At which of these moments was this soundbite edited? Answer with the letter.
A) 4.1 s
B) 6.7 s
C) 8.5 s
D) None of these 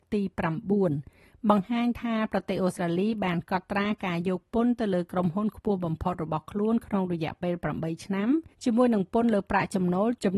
C